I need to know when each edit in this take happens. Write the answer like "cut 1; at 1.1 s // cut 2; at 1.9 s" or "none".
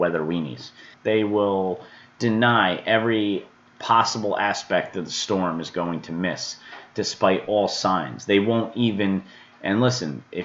cut 1; at 0.9 s

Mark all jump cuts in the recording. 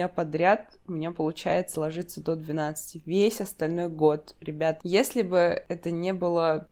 cut 1; at 4.8 s

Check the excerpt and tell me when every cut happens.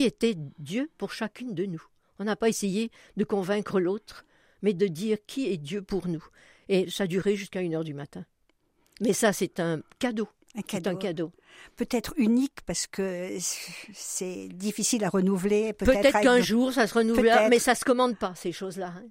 none

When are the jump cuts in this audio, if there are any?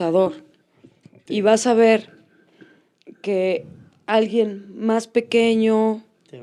cut 1; at 1.3 s

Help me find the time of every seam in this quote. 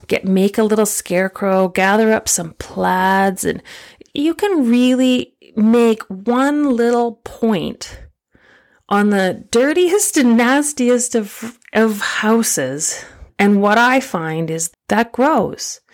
cut 1; at 13.3 s // cut 2; at 14.7 s

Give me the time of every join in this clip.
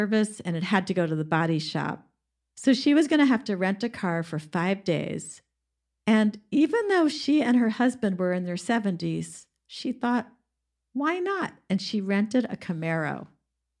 none

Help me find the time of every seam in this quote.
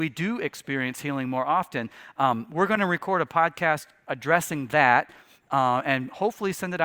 none

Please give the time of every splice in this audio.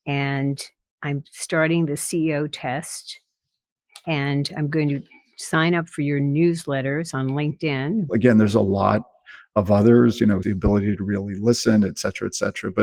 cut 1; at 8.1 s // cut 2; at 10.4 s

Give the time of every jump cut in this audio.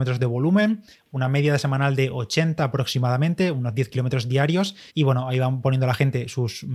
cut 1; at 4.9 s

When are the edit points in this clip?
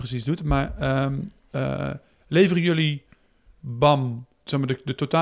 none

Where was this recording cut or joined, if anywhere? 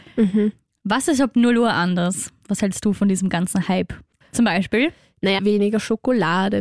cut 1; at 4.2 s // cut 2; at 5.4 s

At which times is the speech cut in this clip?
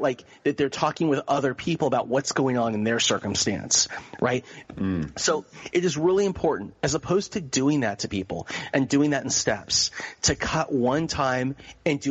cut 1; at 4.6 s

